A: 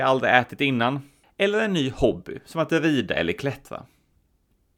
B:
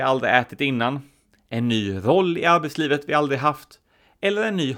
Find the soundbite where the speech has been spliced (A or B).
A